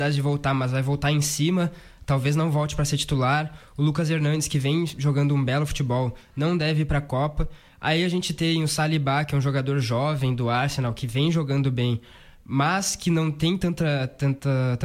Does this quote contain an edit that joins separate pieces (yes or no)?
no